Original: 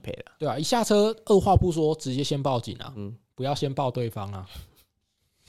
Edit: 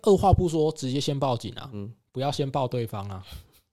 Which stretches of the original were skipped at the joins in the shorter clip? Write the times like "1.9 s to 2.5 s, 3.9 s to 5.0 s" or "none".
none